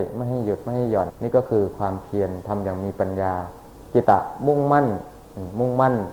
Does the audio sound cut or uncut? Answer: cut